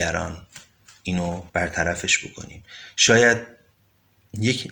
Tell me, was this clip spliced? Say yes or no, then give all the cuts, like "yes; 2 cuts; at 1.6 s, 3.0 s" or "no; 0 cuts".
yes; 1 cut; at 1.5 s